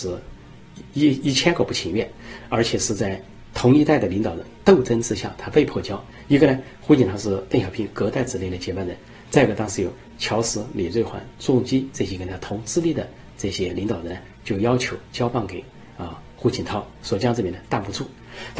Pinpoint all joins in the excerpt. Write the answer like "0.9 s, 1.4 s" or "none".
0.9 s

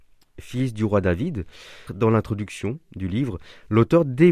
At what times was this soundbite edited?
1.9 s

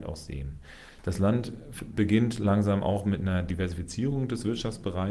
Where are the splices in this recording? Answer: none

